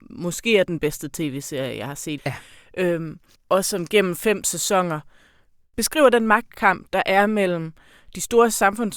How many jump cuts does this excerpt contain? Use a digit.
2